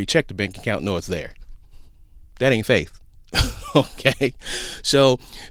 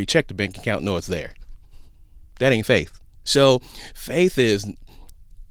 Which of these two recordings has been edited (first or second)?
second